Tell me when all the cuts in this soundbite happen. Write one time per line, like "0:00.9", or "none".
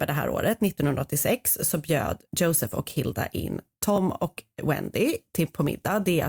0:02.2